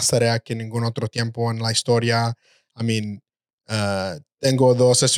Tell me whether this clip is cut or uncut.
uncut